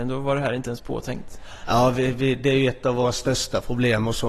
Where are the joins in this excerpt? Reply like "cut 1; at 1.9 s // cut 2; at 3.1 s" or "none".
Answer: cut 1; at 1.6 s